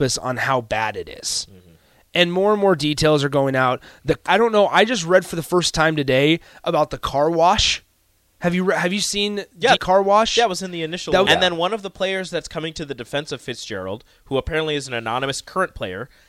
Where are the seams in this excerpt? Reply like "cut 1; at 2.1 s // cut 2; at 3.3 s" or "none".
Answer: cut 1; at 4.3 s // cut 2; at 9.7 s // cut 3; at 11.2 s